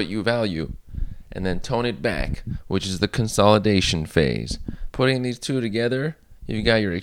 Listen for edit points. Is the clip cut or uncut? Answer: uncut